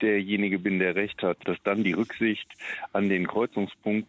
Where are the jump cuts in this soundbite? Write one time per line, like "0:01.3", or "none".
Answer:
0:01.4